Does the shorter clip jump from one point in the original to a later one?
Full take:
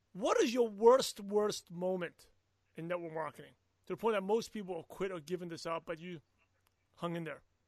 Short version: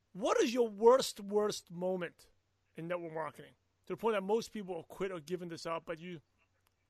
no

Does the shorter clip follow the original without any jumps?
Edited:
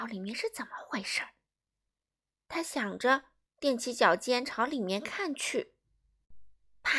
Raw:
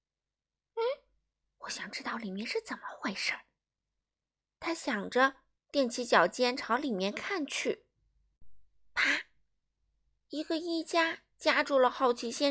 yes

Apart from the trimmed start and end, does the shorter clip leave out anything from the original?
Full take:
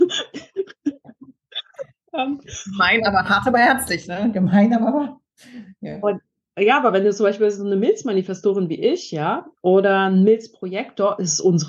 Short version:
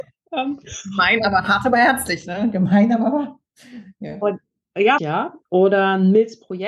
yes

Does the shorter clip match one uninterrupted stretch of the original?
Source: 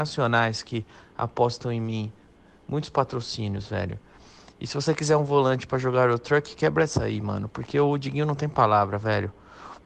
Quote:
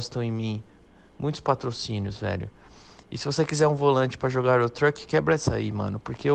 yes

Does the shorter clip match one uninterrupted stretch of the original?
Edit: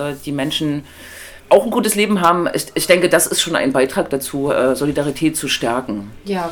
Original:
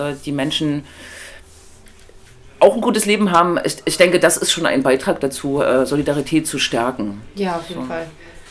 no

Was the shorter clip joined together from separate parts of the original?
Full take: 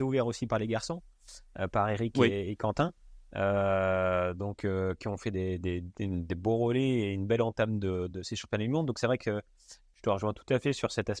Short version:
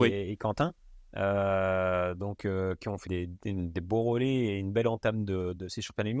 yes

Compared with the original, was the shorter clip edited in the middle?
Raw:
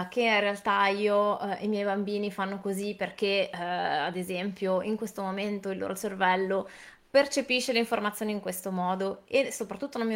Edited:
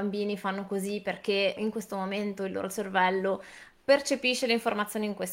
yes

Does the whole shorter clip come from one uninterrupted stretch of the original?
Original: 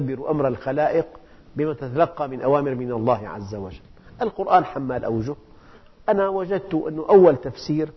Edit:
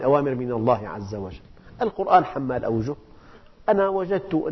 yes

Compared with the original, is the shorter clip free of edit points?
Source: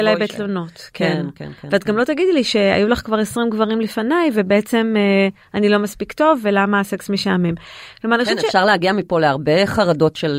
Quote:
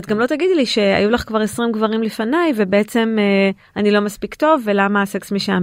yes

